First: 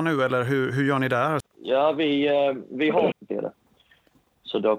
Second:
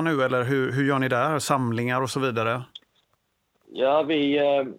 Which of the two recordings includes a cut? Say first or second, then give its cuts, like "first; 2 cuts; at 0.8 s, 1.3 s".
first; 2 cuts; at 1.4 s, 3.1 s